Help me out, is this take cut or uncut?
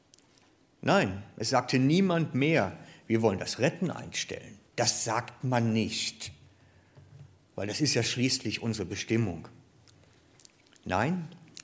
cut